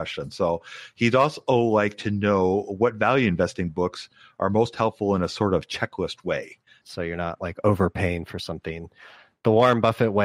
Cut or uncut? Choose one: cut